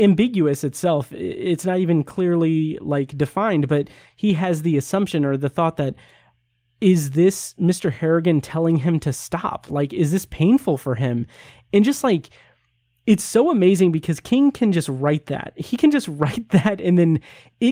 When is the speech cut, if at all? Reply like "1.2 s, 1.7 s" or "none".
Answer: none